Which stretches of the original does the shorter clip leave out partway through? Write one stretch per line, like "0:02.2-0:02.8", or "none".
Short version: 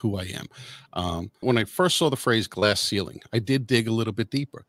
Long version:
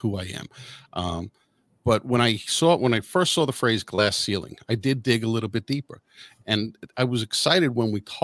0:01.4-0:02.8